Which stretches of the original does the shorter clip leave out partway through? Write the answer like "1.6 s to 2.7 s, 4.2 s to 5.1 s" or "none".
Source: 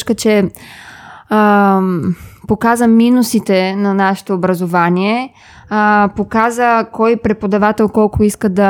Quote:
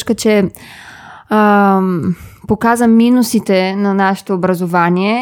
none

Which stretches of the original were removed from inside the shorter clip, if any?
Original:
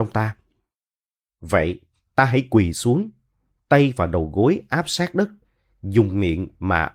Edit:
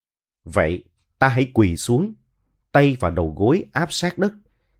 none

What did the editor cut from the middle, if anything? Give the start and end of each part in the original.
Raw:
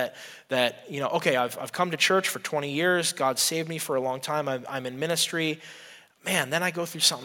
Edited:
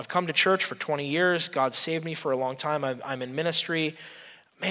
none

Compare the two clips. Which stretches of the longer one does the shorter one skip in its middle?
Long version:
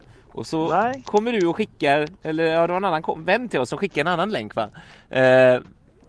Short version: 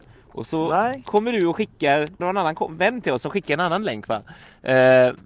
2.2 s to 2.7 s

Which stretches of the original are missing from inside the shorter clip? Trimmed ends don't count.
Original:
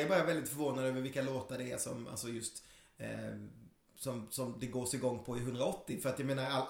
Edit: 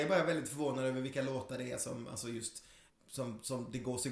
2.9 s to 3.8 s

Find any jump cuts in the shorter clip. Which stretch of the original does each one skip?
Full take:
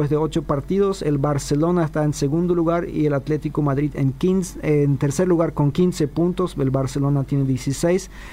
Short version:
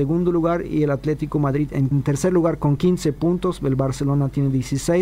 4.1 s to 4.9 s

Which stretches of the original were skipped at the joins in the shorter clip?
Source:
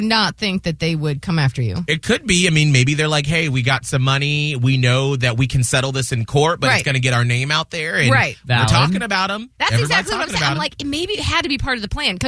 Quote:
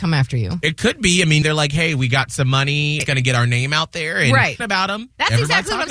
2.7 s to 3.0 s, 4.5 s to 6.8 s, 8.4 s to 9.0 s

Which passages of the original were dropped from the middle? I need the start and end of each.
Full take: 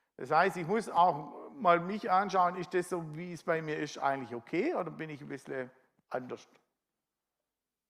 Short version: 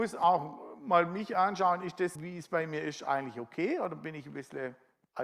2.9 s to 3.1 s

